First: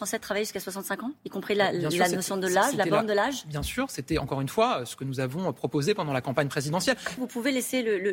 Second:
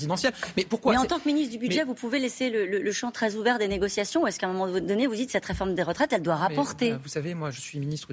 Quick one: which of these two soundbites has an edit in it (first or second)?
first